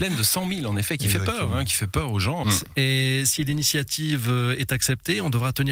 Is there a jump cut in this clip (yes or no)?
yes